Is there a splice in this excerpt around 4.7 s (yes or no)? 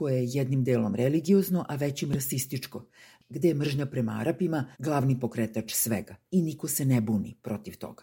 yes